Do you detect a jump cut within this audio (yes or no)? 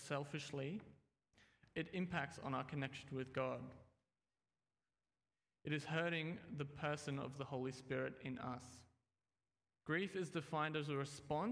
yes